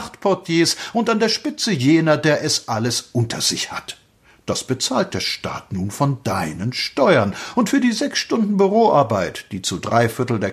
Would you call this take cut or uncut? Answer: uncut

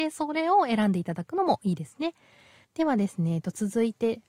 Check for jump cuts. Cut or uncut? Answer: cut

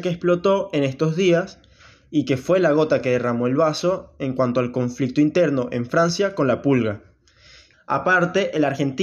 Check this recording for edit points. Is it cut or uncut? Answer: cut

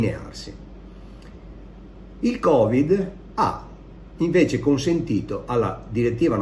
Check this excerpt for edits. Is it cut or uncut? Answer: cut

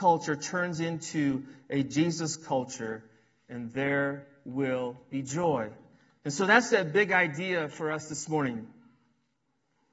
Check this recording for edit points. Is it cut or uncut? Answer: uncut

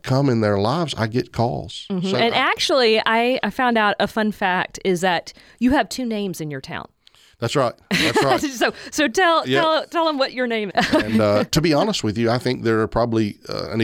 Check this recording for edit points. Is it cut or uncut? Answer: cut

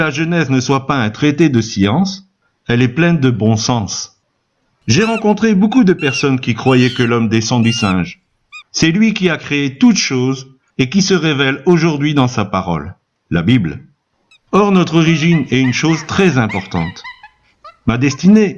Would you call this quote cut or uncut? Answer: cut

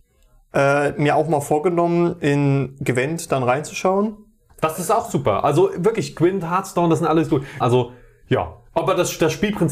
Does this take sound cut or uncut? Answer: cut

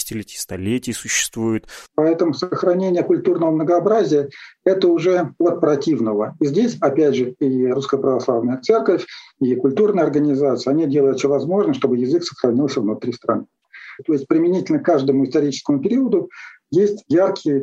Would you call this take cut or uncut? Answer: cut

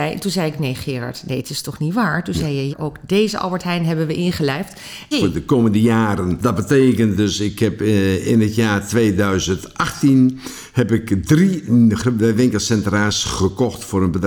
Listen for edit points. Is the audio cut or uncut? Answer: cut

